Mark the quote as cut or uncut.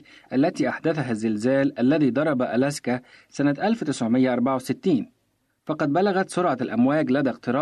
uncut